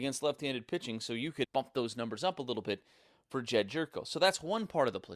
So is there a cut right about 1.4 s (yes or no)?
yes